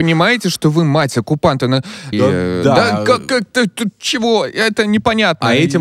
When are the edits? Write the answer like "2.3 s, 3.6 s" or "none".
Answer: 2.1 s